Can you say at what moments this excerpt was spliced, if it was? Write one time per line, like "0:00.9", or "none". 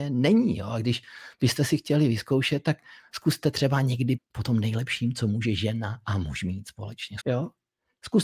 0:04.2
0:07.2